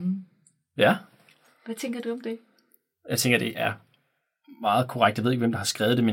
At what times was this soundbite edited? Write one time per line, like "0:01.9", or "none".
none